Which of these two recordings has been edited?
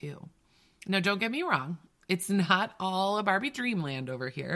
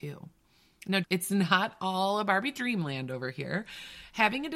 second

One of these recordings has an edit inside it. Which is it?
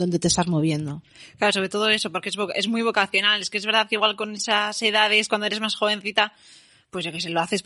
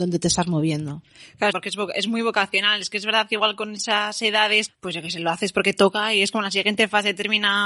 second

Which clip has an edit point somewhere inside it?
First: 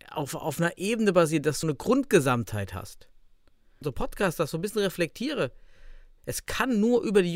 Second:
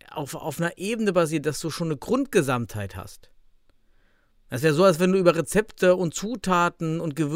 first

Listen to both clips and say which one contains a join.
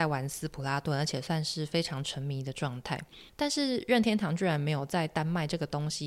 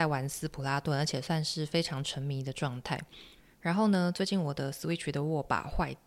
first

